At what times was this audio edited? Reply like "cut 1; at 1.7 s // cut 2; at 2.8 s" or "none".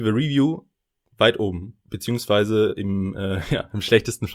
cut 1; at 1.8 s